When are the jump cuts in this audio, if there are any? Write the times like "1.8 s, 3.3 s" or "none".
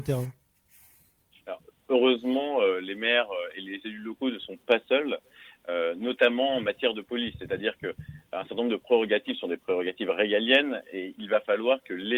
none